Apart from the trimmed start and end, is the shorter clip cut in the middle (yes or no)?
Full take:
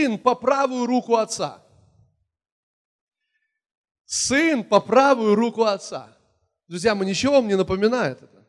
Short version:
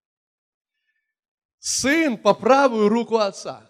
no